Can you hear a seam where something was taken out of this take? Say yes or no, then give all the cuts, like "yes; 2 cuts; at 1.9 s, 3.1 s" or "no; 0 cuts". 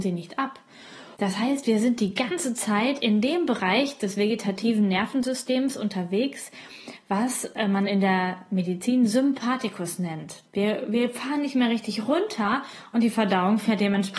yes; 2 cuts; at 1.1 s, 10.4 s